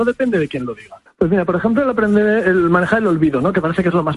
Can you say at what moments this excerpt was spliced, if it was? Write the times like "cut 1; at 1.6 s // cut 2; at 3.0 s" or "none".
cut 1; at 1.1 s